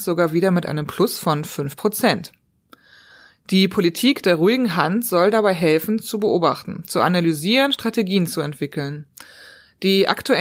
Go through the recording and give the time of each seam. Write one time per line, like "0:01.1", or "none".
none